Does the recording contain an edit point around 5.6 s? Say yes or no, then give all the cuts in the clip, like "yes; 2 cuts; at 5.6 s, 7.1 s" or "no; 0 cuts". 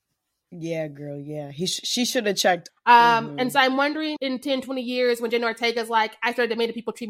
no; 2 cuts; at 2.7 s, 4.2 s